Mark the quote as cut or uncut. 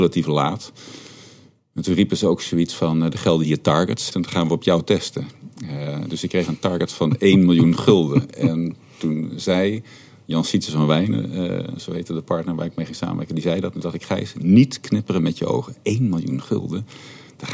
cut